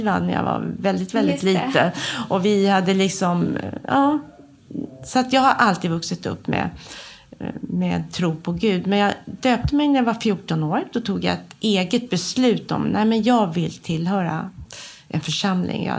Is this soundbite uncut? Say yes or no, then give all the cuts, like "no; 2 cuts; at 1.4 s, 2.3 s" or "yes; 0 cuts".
yes; 0 cuts